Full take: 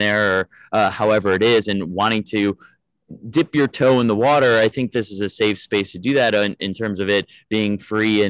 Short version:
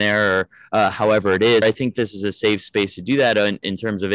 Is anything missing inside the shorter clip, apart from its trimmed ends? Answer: yes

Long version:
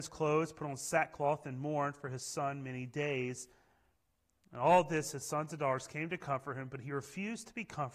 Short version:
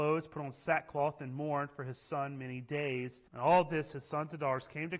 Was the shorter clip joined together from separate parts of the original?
yes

